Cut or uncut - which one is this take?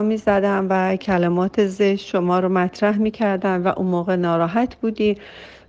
uncut